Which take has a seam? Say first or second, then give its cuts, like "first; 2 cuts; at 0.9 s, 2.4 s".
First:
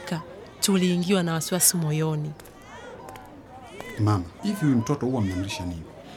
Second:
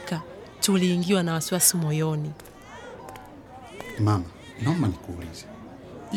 first; 1 cut; at 4.4 s